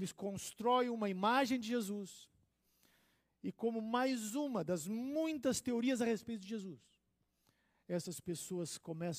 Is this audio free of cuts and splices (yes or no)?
yes